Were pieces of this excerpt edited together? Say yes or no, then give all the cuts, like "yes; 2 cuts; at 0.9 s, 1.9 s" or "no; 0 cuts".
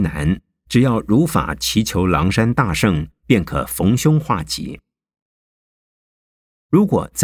no; 0 cuts